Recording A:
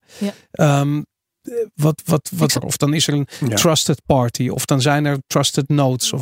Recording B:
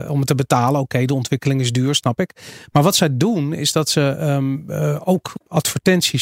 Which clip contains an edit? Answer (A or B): A